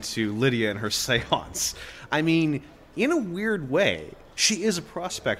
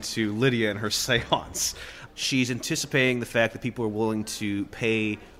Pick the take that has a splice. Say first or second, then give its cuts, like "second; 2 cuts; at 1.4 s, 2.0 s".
second; 1 cut; at 2.1 s